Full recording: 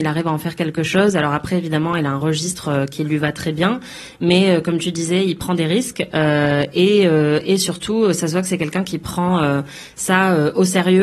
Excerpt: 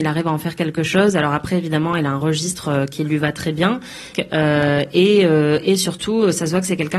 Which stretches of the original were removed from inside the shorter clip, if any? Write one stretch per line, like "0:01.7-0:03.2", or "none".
0:04.1-0:05.9